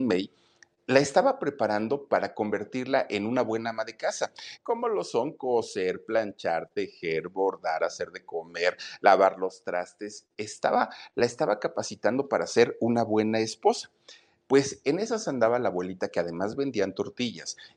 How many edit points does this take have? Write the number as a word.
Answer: one